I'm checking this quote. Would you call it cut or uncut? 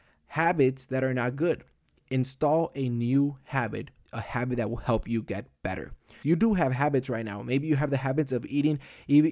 cut